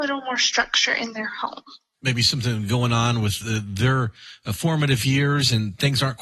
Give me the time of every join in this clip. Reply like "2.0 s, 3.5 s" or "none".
none

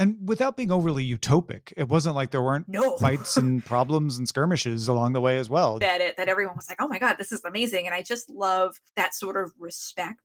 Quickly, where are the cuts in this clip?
5.8 s, 8.9 s

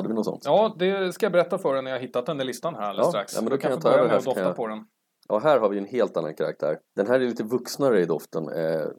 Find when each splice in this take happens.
5.2 s, 6.8 s

